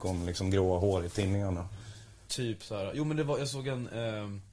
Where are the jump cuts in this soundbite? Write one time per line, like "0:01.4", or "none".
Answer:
0:02.3